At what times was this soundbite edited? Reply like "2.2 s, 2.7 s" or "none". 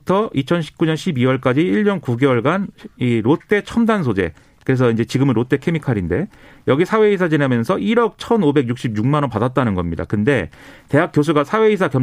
none

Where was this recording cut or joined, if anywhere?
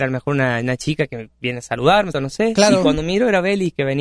2.1 s

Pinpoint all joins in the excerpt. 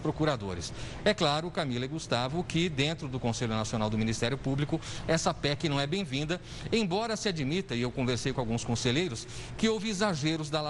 none

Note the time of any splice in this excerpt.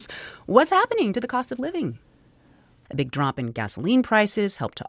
2.9 s

